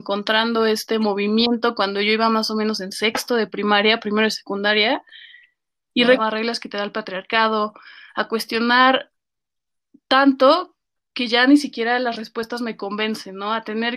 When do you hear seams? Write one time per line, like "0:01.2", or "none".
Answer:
0:06.2